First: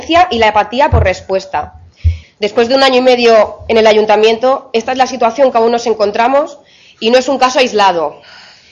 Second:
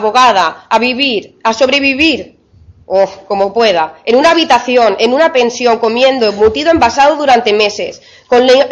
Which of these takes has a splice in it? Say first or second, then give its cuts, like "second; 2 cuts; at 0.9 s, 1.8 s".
first; 1 cut; at 2.2 s